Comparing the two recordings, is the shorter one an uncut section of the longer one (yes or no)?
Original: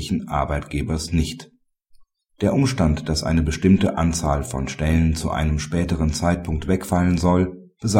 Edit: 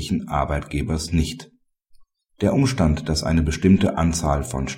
yes